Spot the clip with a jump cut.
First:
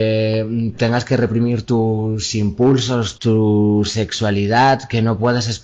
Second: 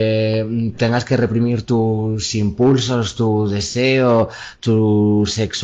first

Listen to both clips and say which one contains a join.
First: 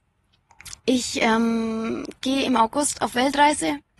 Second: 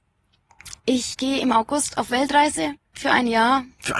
second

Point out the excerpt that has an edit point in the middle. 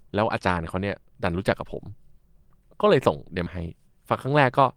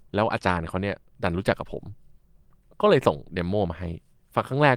first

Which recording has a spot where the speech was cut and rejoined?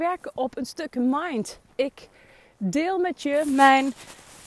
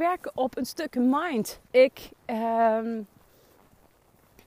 second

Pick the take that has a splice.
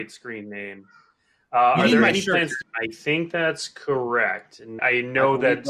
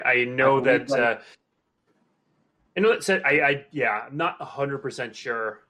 first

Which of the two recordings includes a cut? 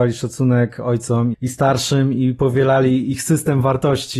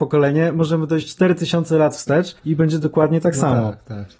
first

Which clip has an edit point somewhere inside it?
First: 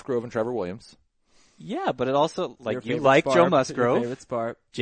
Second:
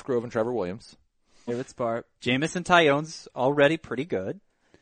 second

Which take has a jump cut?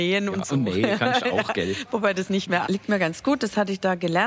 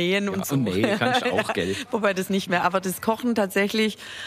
first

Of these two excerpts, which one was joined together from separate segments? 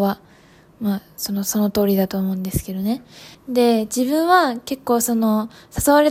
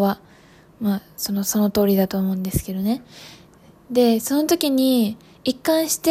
first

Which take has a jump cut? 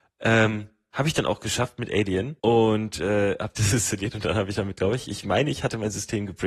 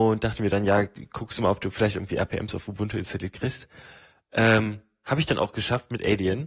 first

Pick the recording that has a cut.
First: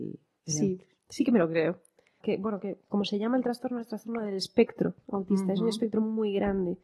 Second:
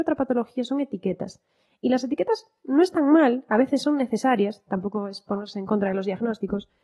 first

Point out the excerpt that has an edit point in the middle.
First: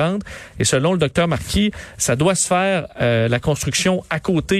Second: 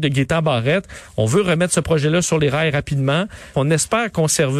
second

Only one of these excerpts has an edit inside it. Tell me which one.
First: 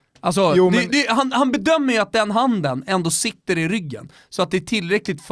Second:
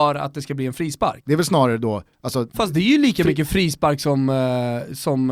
second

